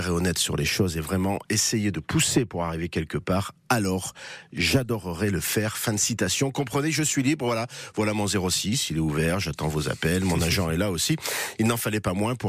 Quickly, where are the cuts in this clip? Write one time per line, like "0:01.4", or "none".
none

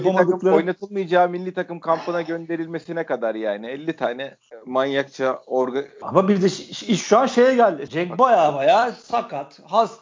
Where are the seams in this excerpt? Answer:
0:06.0
0:07.9

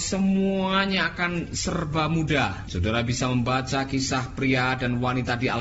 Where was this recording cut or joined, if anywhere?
0:02.7

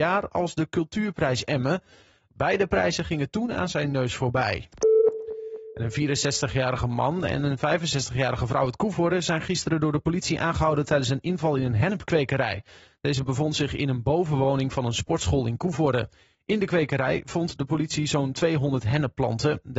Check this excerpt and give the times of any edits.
none

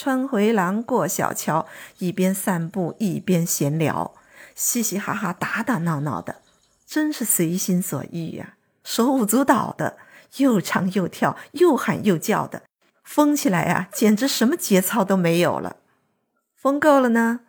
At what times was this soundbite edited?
0:08.8

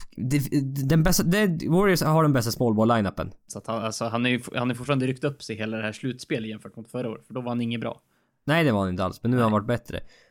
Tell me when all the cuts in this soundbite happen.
0:03.5

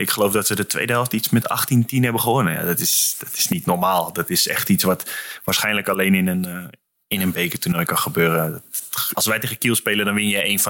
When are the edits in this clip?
0:09.1

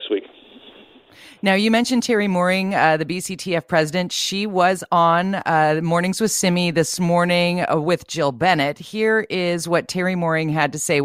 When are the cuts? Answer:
none

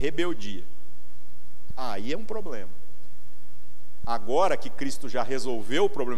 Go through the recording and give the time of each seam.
0:01.7
0:04.0

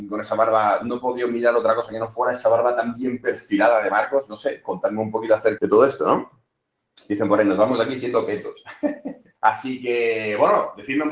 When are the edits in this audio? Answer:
0:05.6
0:09.3

